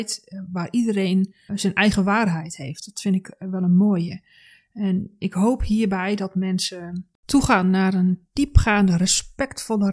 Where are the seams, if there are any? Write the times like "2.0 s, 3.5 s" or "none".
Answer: 1.5 s, 7.1 s